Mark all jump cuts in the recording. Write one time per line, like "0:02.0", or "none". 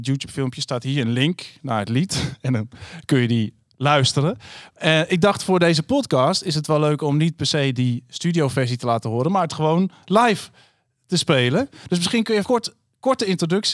0:12.4